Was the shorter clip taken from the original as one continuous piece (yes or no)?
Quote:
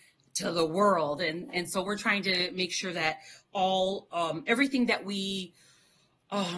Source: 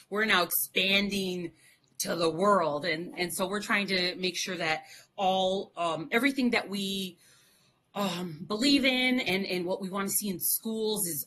yes